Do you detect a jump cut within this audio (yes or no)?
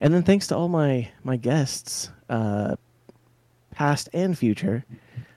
no